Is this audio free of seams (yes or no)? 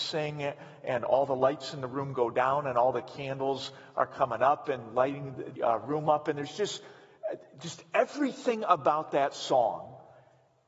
no